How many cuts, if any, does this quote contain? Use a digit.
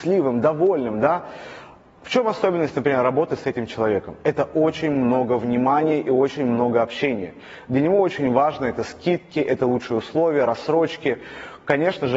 0